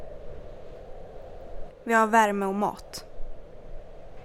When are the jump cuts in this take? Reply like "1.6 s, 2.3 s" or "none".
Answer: 1.7 s